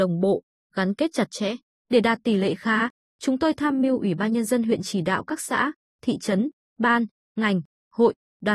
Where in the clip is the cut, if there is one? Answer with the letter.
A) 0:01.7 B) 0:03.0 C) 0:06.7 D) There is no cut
A